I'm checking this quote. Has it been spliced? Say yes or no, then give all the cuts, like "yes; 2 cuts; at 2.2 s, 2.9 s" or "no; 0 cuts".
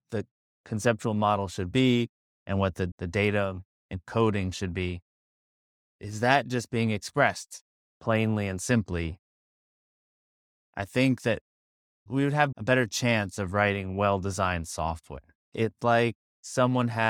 yes; 1 cut; at 15.4 s